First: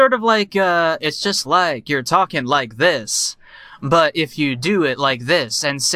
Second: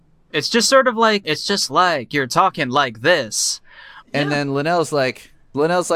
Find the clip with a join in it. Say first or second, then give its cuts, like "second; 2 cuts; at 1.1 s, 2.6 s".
second; 2 cuts; at 1.2 s, 4.0 s